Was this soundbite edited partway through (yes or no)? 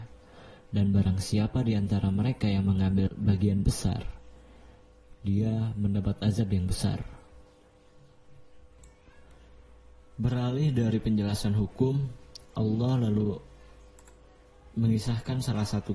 no